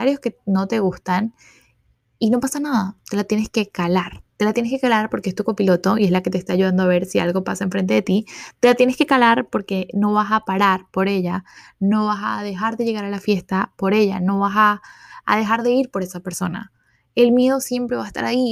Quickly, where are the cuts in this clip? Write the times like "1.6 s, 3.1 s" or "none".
none